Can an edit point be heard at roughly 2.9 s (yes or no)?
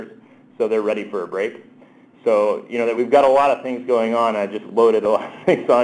yes